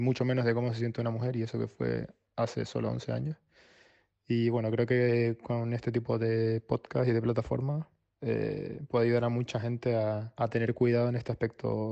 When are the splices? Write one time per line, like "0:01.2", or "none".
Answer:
none